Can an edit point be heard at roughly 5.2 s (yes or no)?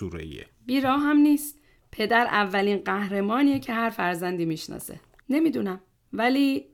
yes